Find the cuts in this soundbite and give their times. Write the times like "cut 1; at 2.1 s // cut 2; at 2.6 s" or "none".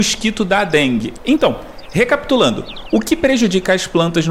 cut 1; at 1.2 s